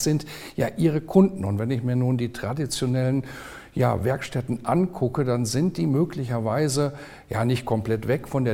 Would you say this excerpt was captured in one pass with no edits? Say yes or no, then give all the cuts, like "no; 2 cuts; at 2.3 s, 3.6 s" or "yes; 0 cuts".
yes; 0 cuts